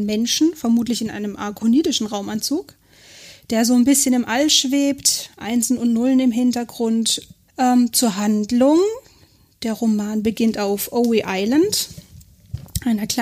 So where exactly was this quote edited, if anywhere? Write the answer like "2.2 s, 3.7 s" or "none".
7.4 s